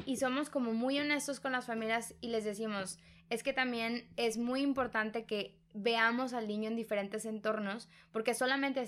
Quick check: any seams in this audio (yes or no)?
no